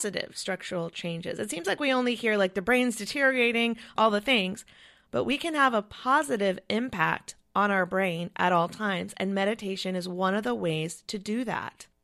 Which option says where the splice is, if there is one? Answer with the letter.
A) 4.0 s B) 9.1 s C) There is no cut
A